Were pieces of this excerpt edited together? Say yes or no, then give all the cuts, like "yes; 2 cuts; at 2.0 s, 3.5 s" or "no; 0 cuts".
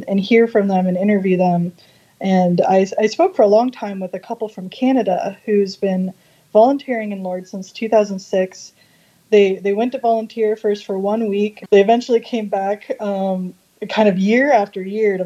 yes; 1 cut; at 11.7 s